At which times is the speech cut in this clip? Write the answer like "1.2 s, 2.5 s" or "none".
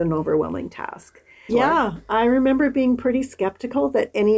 1.5 s

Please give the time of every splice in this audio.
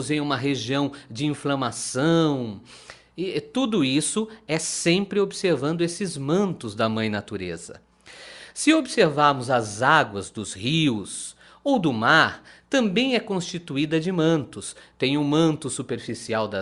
none

